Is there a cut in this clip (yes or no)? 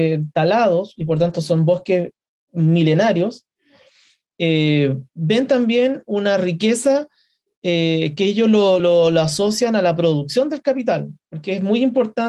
no